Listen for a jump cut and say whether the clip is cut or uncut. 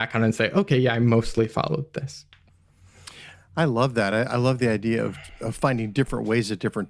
uncut